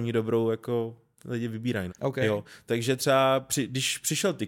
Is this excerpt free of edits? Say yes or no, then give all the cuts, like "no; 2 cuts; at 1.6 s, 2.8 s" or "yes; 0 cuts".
no; 1 cut; at 1.9 s